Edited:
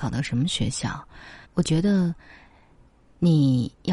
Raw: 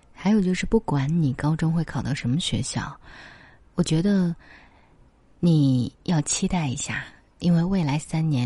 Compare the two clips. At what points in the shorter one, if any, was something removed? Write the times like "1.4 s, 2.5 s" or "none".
1.4 s